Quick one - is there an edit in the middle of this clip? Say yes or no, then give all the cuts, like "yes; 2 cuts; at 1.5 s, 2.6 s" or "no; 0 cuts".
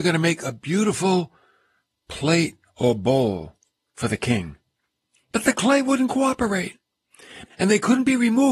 yes; 1 cut; at 7.5 s